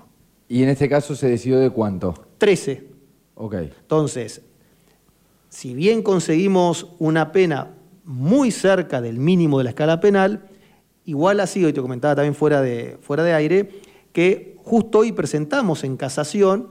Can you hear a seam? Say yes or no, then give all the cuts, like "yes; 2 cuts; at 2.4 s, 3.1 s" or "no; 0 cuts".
no; 0 cuts